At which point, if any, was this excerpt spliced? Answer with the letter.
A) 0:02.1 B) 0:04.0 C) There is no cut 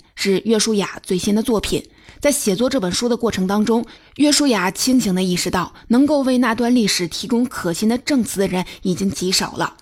C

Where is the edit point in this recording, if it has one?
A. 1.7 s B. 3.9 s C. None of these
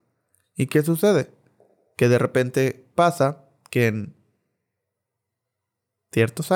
C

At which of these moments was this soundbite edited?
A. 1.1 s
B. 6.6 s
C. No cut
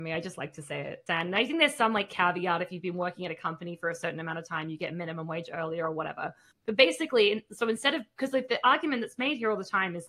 A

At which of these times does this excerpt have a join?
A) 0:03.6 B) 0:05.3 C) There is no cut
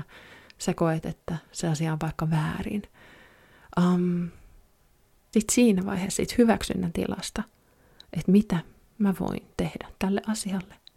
B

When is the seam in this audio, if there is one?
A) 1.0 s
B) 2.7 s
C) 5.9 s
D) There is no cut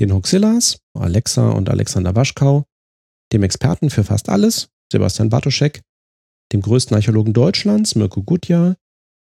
A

